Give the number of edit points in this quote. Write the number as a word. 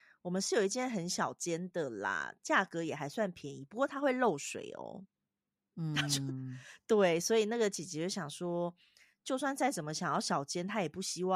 zero